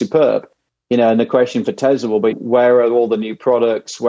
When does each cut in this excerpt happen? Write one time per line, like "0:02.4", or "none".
0:02.3